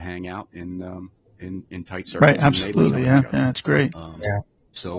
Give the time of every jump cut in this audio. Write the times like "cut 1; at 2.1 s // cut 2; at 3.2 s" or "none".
none